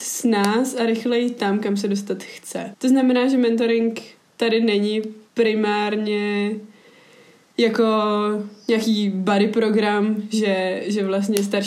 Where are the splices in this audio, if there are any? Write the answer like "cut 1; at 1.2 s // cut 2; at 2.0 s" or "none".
cut 1; at 2.7 s // cut 2; at 5.3 s